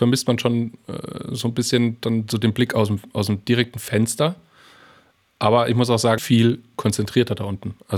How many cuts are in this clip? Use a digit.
1